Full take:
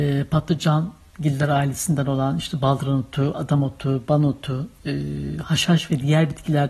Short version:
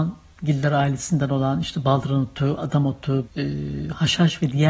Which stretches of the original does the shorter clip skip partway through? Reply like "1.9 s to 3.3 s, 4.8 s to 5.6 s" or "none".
4.0 s to 4.8 s